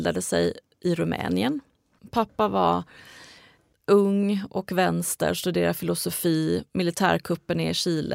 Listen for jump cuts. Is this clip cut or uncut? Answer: uncut